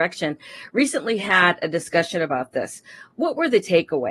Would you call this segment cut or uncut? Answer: uncut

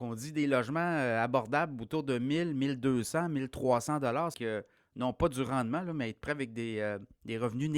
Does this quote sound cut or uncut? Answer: cut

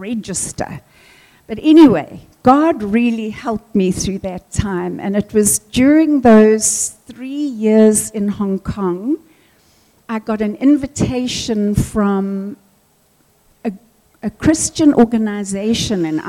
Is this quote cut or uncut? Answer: uncut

